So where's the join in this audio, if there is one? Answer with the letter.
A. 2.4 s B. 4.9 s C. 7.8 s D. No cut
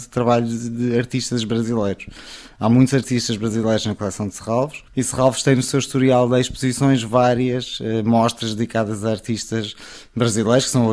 B